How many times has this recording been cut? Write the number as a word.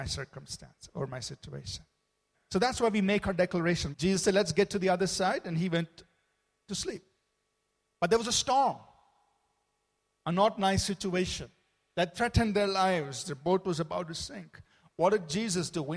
two